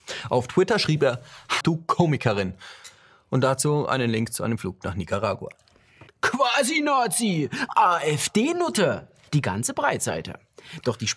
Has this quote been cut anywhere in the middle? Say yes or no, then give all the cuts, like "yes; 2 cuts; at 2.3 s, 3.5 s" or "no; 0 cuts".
yes; 2 cuts; at 1.6 s, 6.1 s